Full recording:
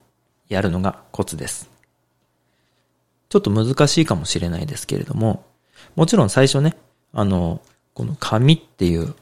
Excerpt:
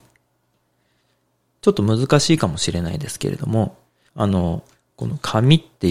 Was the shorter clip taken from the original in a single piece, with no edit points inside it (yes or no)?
no